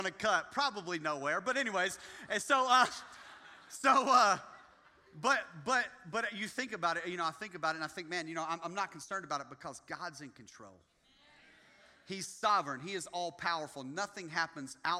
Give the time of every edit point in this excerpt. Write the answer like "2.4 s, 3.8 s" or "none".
none